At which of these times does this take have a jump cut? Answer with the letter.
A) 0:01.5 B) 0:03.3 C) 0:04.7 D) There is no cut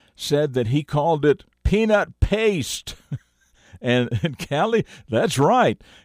A